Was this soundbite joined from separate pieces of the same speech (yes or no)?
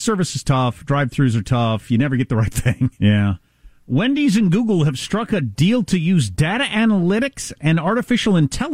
yes